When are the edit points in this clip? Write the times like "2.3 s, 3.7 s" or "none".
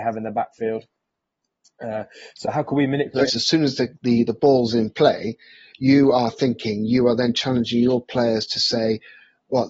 3.3 s